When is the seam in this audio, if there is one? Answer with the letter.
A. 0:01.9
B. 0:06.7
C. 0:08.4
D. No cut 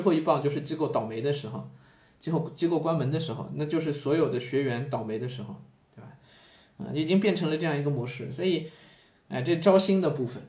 D